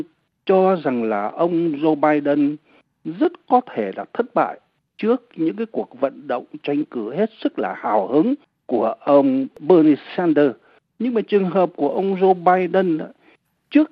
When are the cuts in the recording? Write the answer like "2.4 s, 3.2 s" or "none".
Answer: 10.9 s